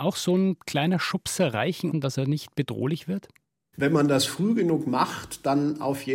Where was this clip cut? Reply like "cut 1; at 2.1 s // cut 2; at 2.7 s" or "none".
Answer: cut 1; at 1.9 s